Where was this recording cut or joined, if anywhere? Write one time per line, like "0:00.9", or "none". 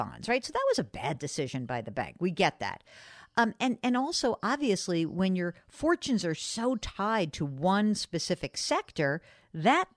none